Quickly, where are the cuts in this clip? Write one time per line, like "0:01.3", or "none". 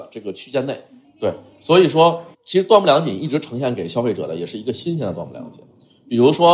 0:01.0
0:02.3